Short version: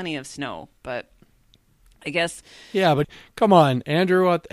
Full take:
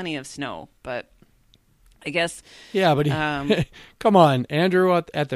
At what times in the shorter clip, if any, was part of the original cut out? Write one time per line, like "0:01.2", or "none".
0:03.0